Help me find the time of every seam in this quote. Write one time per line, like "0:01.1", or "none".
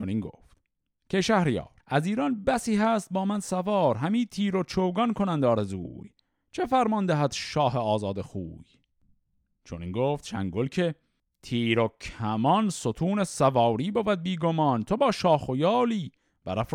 0:01.8